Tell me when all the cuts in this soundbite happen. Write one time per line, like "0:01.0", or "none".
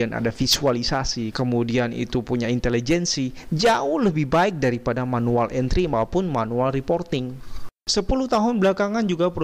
0:01.3

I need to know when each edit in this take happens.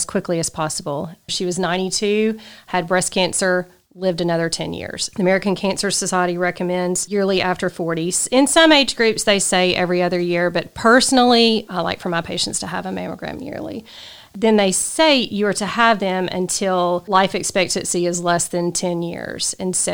0:01.3
0:05.1

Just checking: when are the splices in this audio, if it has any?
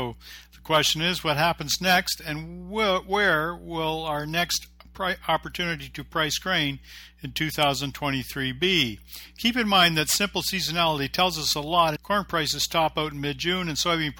0:12.0

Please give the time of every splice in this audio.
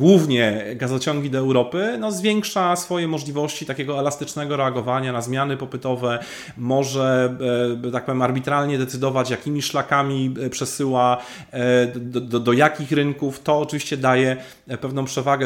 none

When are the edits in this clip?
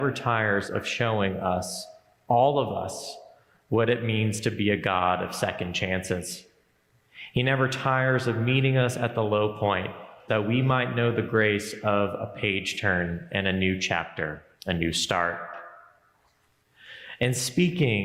0:10.3
0:14.5

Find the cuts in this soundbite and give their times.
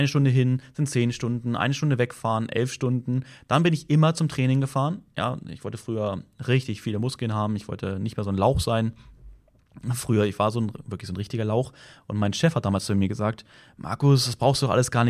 none

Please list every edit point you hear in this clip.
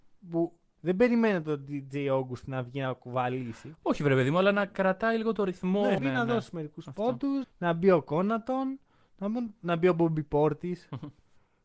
0:06.0
0:07.4

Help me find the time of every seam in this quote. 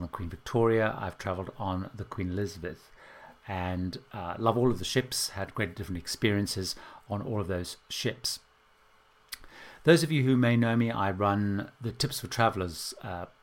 none

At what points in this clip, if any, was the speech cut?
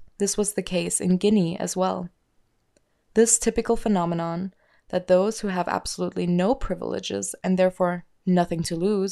none

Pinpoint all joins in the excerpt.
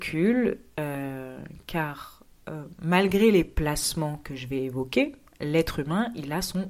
none

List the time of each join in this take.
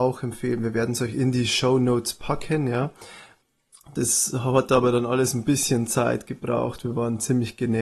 none

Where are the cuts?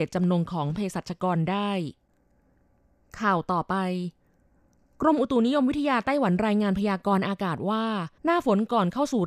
0:08.2

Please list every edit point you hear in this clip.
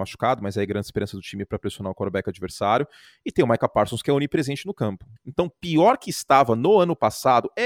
0:05.2

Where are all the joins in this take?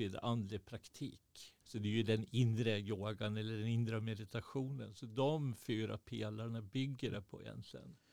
0:01.6

